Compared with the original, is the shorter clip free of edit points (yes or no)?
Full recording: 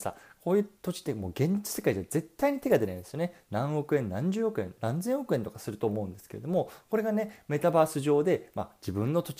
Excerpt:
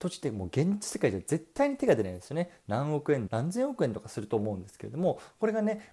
no